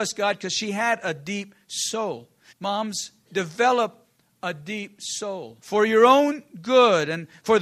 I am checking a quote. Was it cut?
yes; 2 cuts; at 2.5 s, 5.6 s

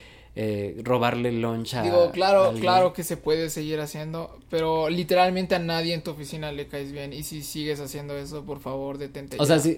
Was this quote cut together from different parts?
no; 0 cuts

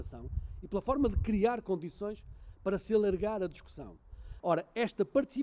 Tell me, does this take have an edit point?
yes; 1 cut; at 4.4 s

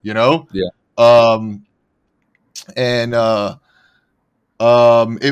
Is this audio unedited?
yes; 0 cuts

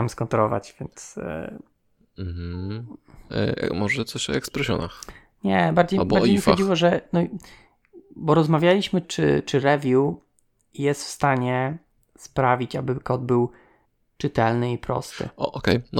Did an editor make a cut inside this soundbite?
yes; 1 cut; at 9.0 s

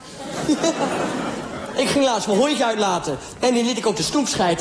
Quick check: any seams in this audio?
no; 0 cuts

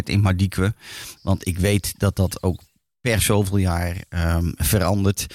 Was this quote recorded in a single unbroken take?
no; 1 cut; at 1.2 s

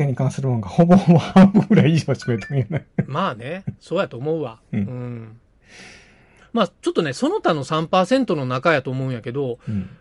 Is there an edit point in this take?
no; 0 cuts

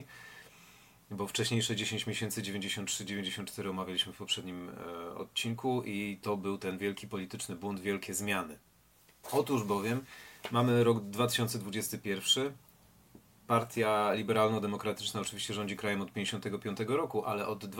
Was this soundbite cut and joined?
yes; 1 cut; at 9.2 s

